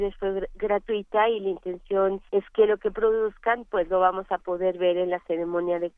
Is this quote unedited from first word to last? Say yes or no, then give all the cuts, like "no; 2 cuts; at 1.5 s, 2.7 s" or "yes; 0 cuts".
no; 1 cut; at 2.3 s